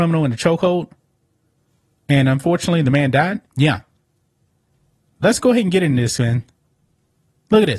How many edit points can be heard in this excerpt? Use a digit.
1